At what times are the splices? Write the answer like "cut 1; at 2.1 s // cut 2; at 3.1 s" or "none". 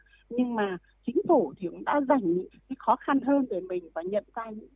cut 1; at 2.5 s